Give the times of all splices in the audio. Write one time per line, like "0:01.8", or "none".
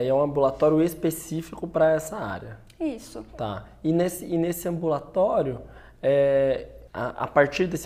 0:06.9